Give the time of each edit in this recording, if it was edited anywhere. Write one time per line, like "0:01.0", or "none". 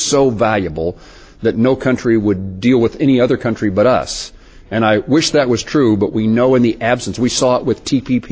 none